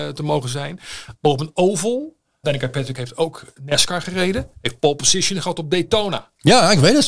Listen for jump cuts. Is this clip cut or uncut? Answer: cut